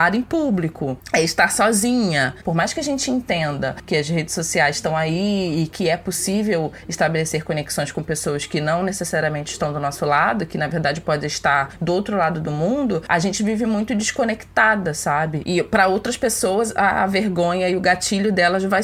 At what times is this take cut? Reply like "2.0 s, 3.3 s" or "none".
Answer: 2.4 s, 15.4 s